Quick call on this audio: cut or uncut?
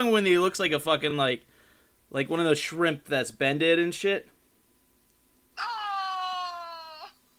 uncut